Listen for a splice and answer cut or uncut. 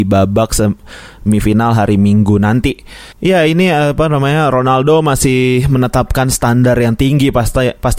cut